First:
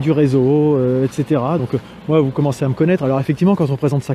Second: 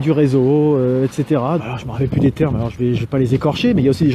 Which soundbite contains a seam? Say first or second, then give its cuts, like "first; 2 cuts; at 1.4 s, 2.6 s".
second; 1 cut; at 1.6 s